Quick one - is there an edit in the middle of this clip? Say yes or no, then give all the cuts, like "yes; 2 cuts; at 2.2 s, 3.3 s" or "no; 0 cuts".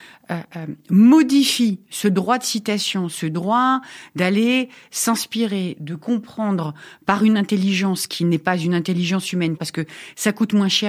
yes; 1 cut; at 5.8 s